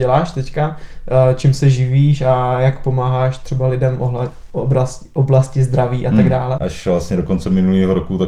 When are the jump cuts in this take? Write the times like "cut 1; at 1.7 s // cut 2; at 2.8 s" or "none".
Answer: cut 1; at 6.6 s